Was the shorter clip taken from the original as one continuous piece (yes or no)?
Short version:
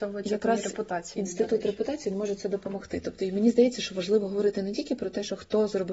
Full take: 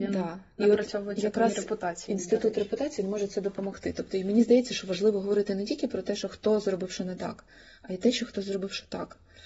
yes